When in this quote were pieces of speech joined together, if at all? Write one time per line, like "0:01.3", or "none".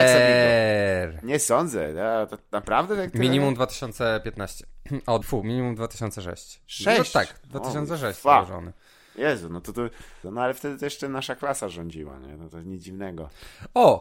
0:05.2
0:10.2